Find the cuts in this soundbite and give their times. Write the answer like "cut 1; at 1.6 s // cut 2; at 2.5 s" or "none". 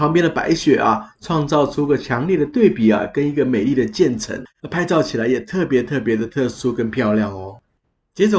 none